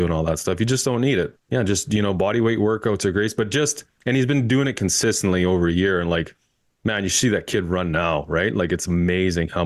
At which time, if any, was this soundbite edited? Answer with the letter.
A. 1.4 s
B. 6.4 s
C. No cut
A